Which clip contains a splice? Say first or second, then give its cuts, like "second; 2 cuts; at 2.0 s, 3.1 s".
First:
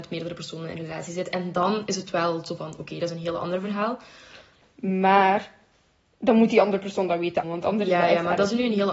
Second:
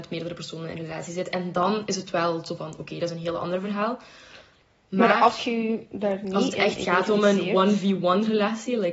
first; 2 cuts; at 4.6 s, 7.4 s